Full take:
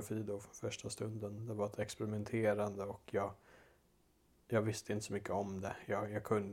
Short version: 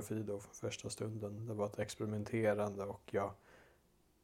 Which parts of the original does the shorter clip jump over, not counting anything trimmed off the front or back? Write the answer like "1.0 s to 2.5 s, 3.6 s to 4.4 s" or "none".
none